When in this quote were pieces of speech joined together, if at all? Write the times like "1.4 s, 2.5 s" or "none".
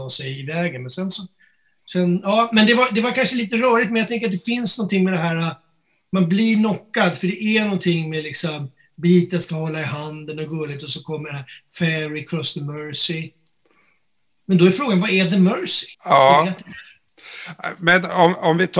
15.9 s